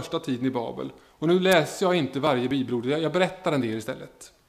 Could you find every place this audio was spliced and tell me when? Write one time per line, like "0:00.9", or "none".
none